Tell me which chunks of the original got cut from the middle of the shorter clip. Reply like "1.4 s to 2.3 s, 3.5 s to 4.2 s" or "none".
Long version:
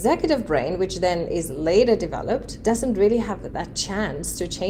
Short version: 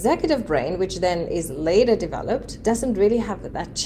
none